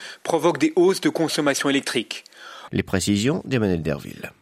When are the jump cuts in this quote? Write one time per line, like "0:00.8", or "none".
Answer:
0:02.7